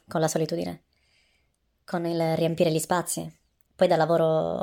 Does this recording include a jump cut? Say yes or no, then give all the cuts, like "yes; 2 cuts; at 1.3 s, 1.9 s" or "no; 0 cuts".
yes; 1 cut; at 3.7 s